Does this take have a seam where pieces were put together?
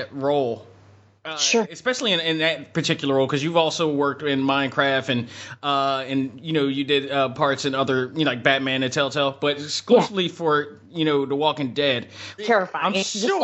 yes; 1 cut; at 12.4 s

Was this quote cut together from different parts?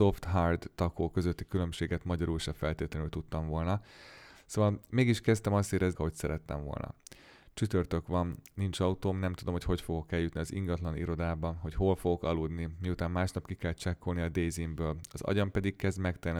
yes; 1 cut; at 5.9 s

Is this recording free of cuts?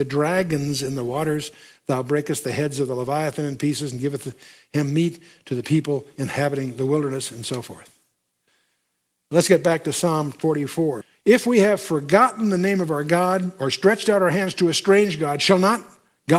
yes; 0 cuts

